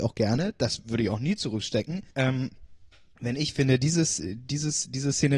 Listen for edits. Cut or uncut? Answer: cut